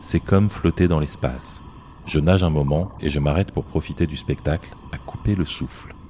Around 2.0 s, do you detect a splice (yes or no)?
yes